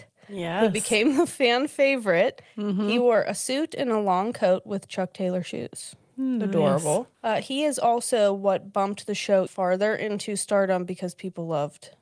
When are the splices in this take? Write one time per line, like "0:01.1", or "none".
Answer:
0:07.1
0:09.5